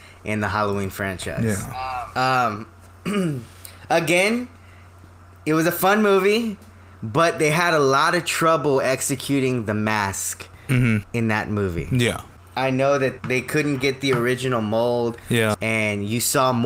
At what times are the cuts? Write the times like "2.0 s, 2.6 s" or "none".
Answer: 13.2 s, 15.5 s